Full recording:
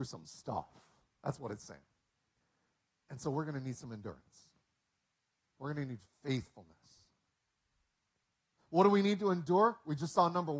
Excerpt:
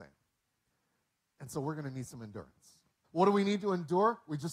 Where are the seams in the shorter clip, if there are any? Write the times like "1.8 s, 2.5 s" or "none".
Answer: 3.0 s